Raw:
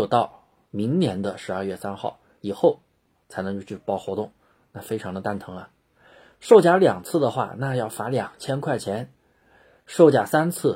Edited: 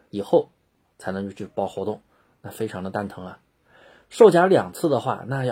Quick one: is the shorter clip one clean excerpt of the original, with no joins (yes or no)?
yes